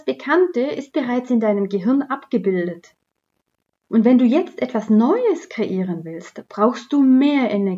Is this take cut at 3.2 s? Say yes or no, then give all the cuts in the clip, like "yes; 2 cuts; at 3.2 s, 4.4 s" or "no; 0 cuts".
no; 0 cuts